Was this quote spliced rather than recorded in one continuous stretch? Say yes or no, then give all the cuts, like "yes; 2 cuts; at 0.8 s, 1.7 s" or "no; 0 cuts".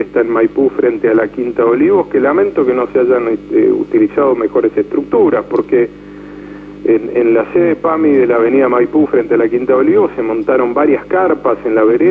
no; 0 cuts